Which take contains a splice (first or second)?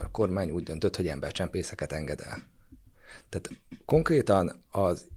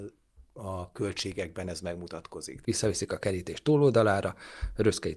second